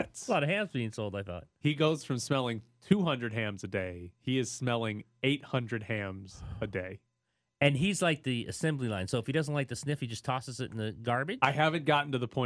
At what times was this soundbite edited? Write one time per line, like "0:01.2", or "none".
none